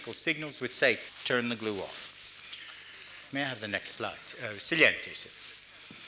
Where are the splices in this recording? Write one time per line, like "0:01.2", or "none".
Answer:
0:01.1
0:03.3